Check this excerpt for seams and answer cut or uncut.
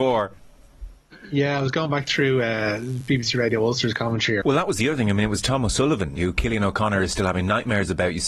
cut